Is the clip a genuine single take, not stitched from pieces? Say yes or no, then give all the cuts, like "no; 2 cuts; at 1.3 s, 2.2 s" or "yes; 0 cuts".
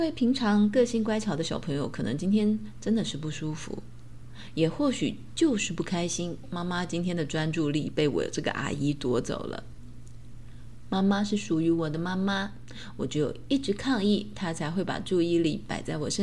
yes; 0 cuts